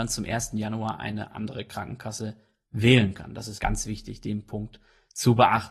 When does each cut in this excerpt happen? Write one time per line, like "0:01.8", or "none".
0:03.6